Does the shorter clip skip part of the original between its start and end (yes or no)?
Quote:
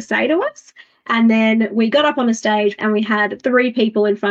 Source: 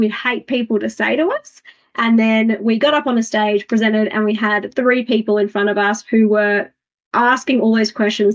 yes